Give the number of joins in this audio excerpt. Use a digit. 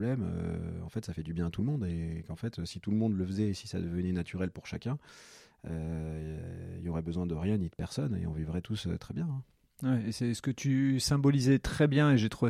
0